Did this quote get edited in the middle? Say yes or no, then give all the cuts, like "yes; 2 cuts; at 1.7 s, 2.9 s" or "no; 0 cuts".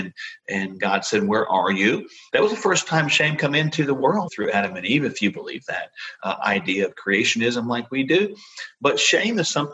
yes; 2 cuts; at 2.3 s, 4.3 s